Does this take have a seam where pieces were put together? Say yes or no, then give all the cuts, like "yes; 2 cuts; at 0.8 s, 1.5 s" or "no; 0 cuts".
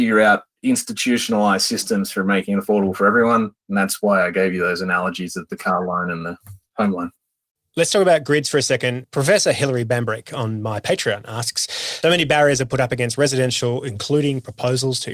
yes; 1 cut; at 12.0 s